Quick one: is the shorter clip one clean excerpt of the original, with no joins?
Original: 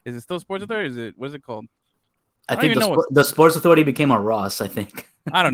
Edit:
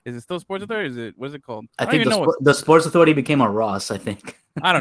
no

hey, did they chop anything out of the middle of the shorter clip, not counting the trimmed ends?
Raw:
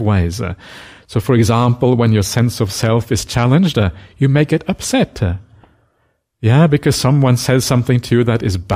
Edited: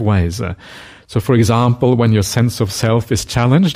no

